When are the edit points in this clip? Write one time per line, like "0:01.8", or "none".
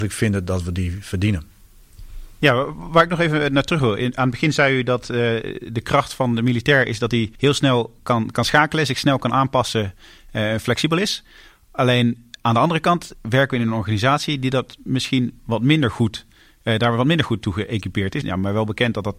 0:07.4
0:18.2